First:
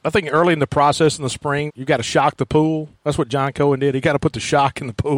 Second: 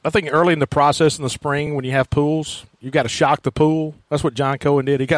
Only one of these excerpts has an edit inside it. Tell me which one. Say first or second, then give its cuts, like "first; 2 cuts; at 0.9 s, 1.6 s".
first; 1 cut; at 1.7 s